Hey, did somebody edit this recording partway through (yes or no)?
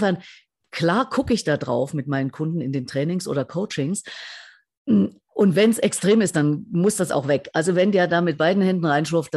no